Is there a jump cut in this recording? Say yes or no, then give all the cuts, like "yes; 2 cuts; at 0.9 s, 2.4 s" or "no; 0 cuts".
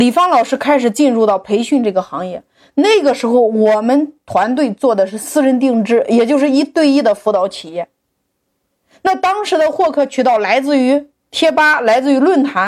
no; 0 cuts